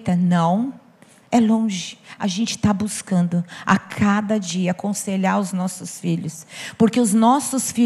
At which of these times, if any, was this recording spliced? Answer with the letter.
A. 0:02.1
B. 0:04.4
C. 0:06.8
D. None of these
D